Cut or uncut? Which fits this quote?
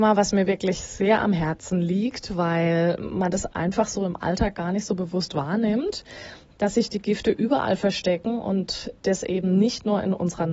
uncut